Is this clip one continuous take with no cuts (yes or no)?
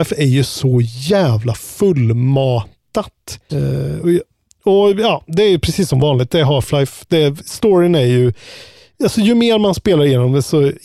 no